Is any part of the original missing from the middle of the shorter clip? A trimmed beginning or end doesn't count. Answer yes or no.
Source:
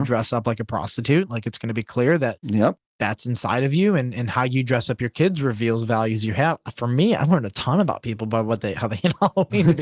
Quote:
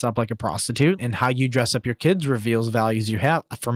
yes